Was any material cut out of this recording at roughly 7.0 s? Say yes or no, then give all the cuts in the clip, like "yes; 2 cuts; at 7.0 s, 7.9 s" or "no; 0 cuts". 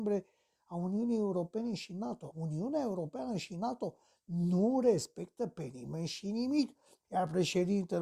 yes; 2 cuts; at 2.3 s, 7.0 s